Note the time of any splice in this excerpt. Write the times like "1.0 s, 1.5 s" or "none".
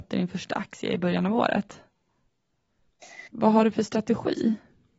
3.3 s